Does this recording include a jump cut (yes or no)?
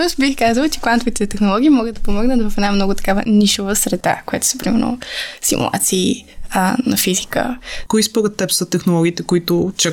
yes